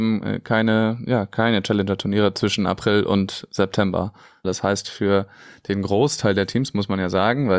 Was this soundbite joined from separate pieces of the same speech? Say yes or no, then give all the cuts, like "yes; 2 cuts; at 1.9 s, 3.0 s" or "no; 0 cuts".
yes; 1 cut; at 4.4 s